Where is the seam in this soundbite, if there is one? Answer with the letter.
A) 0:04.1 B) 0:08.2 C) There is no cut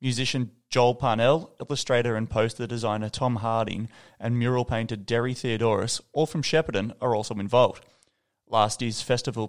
C